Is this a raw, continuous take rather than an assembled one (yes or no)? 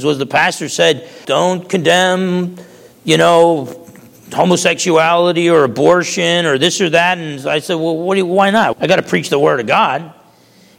no